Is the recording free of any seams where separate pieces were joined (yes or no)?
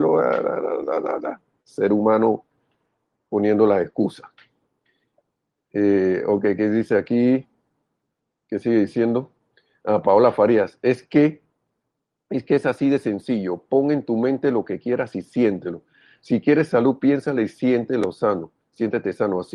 yes